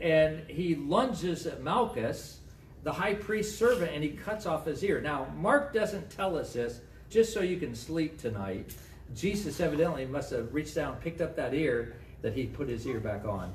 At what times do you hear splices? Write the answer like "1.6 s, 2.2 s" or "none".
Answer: 7.1 s, 9.1 s, 12.2 s